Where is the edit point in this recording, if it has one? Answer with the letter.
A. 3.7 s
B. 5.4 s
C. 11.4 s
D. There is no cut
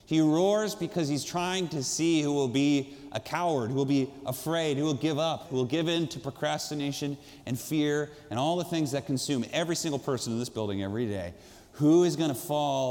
B